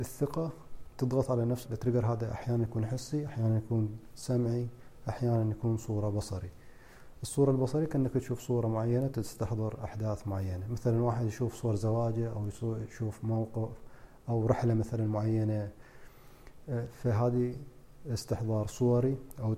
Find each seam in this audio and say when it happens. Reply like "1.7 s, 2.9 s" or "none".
1.6 s